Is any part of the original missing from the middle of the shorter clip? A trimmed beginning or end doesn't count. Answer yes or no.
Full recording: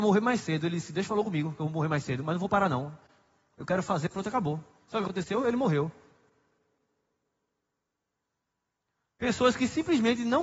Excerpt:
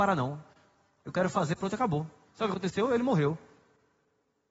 no